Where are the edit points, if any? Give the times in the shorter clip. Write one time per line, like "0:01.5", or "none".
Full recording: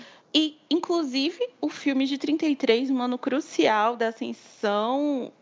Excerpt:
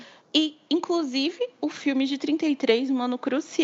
none